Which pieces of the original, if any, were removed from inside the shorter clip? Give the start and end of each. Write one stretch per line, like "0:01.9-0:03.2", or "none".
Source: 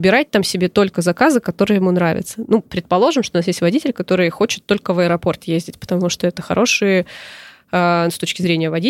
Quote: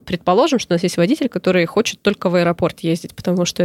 none